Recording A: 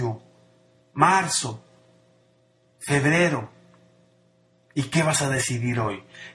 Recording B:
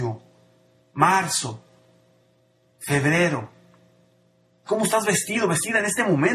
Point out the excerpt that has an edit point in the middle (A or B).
B